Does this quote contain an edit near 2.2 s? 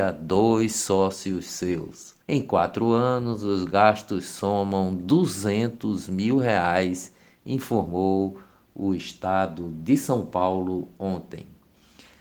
yes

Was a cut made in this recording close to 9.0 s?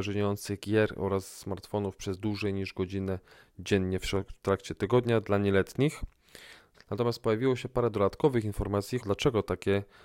yes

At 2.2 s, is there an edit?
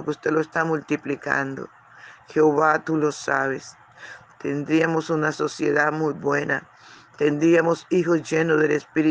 yes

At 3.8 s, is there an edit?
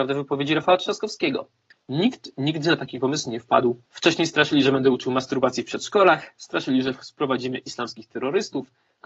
yes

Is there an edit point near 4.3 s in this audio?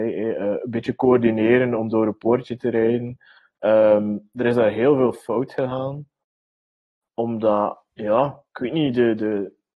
no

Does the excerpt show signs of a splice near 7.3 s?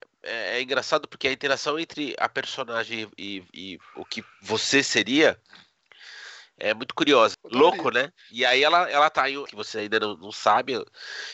yes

